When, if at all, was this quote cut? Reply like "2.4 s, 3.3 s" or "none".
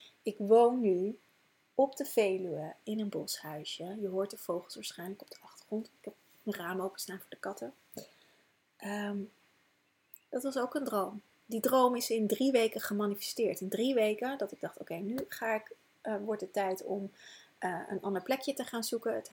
none